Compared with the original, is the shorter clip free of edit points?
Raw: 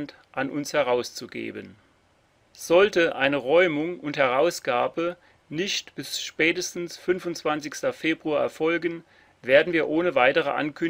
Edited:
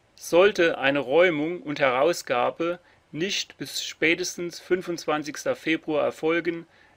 yes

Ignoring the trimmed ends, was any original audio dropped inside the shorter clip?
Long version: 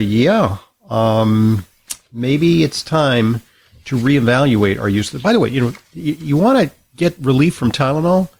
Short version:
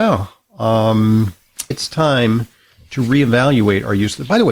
yes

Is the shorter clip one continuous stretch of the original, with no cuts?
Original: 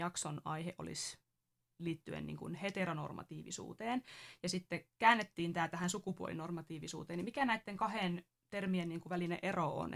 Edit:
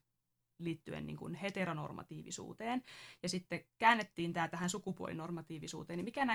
yes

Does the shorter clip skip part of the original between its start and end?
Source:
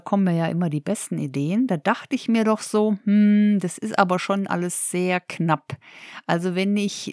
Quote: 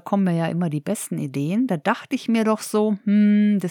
no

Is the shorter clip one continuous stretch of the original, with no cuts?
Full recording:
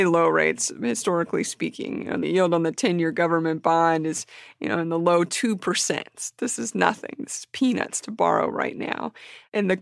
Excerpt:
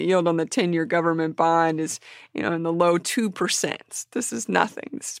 yes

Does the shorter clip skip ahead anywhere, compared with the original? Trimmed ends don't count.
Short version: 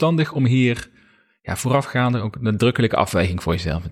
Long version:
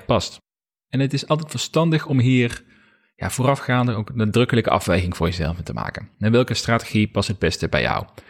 no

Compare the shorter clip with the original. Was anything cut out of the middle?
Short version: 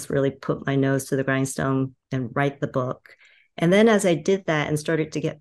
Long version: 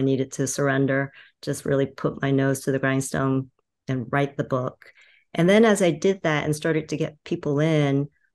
yes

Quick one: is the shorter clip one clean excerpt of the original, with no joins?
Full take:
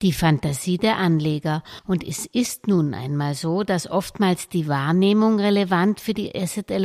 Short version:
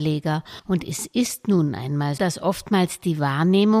no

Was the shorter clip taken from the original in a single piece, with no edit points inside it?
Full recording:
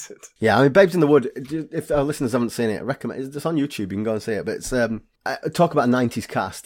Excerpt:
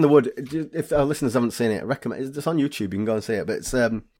yes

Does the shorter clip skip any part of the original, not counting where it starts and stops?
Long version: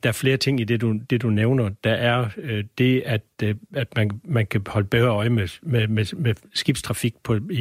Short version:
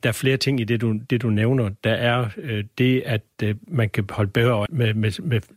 yes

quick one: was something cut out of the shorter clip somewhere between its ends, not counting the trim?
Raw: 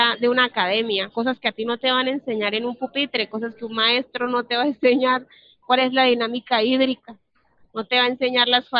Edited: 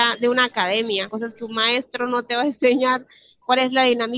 yes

